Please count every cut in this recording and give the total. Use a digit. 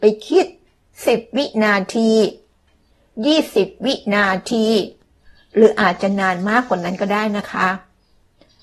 0